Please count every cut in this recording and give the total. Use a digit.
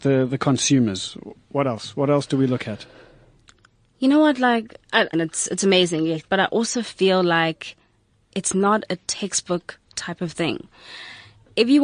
2